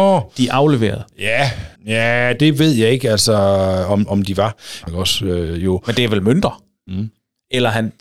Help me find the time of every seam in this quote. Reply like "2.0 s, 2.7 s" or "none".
1.8 s, 4.9 s, 6.9 s